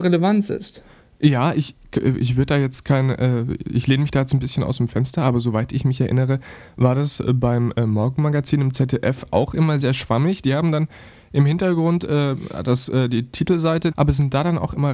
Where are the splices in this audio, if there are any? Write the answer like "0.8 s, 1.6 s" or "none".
9.8 s, 13.9 s